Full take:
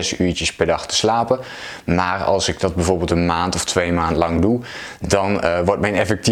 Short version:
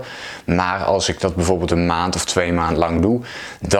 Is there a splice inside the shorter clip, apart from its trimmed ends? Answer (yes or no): no